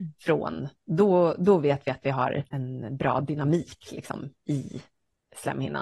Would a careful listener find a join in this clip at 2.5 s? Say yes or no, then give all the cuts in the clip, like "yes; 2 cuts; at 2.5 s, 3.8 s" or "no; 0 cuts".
yes; 1 cut; at 2.5 s